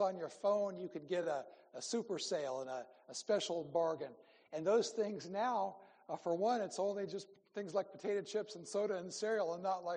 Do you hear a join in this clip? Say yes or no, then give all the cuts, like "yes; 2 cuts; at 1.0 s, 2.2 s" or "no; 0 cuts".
no; 0 cuts